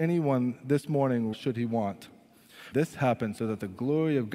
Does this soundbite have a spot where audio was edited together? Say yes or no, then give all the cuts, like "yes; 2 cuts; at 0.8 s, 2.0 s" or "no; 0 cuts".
yes; 2 cuts; at 1.3 s, 2.7 s